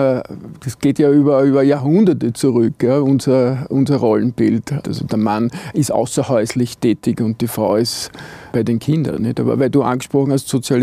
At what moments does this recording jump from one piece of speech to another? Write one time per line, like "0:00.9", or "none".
0:04.8
0:08.5